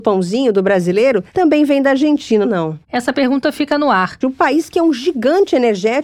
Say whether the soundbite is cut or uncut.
cut